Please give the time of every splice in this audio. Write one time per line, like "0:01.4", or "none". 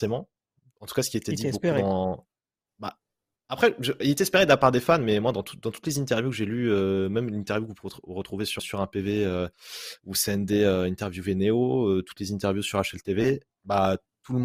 0:08.6